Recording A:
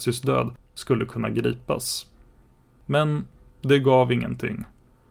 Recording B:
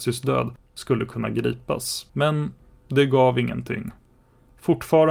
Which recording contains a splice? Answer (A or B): B